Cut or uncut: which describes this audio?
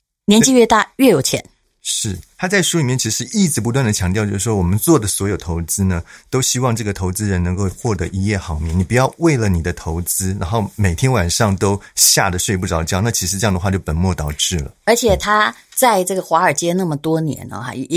uncut